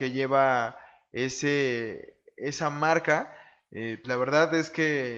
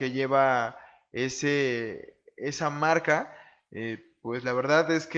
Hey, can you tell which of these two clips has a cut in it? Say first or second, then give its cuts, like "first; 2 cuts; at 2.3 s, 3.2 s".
first; 1 cut; at 4.0 s